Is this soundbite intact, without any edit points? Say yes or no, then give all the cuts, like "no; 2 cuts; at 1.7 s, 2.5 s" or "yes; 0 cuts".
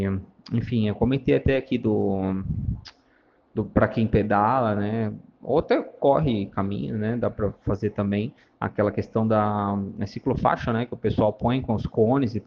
yes; 0 cuts